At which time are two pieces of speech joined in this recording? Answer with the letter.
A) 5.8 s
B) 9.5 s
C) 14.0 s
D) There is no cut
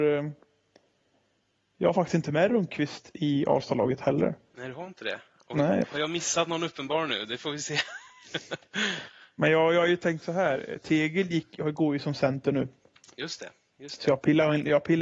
A